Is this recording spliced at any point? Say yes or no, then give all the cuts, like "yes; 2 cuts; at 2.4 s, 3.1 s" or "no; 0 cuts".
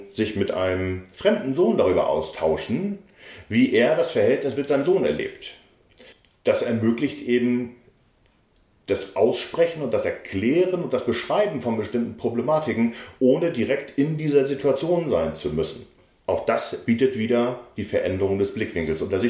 no; 0 cuts